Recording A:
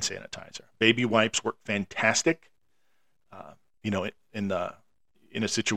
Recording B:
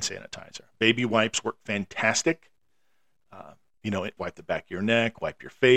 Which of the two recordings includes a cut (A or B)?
B